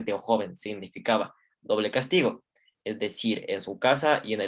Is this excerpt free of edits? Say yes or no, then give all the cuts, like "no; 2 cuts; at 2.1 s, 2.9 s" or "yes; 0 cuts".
yes; 0 cuts